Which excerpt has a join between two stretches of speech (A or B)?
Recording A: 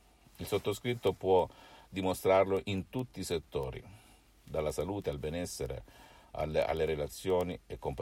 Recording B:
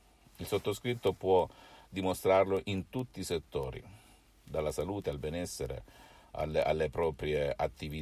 A